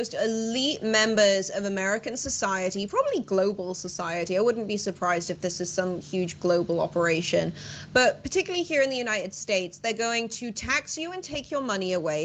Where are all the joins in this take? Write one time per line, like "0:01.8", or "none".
none